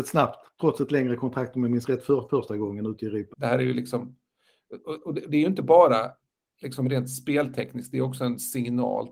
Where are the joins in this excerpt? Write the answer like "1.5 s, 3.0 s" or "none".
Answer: 3.3 s